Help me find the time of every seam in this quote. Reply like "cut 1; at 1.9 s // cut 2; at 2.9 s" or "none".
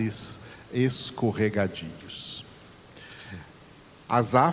none